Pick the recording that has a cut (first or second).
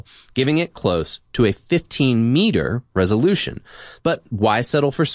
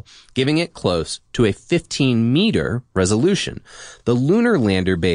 first